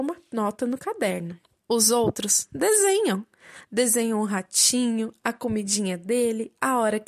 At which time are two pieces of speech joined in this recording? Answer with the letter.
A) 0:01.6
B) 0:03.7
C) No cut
A